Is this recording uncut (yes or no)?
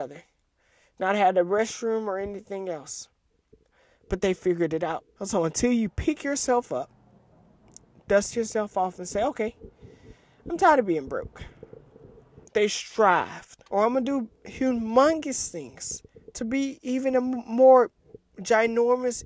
no